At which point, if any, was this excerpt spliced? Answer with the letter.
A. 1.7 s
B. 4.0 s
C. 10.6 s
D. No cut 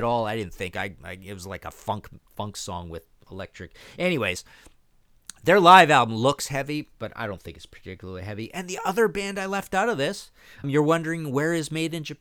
C